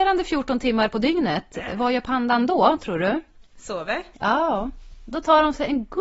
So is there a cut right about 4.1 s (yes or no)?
yes